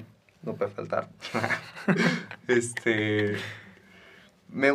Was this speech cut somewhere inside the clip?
no; 0 cuts

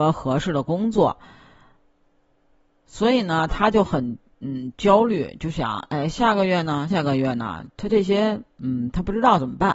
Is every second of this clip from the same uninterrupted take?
no; 1 cut; at 6.9 s

